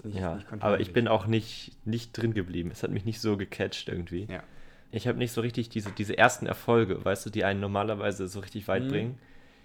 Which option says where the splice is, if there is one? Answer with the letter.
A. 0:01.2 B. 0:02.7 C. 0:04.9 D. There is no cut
C